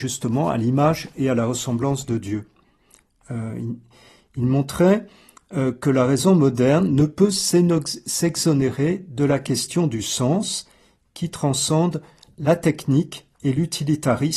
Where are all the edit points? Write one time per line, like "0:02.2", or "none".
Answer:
none